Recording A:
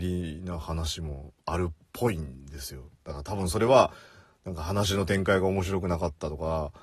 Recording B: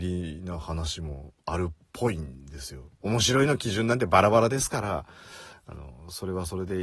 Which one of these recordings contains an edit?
B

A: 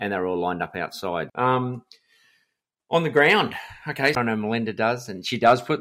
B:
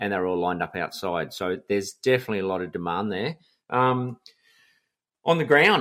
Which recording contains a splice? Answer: A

